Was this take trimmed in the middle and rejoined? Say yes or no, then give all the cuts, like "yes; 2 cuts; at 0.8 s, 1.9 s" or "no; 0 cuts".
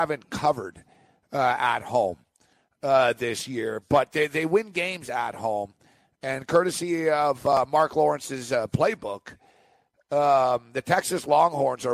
no; 0 cuts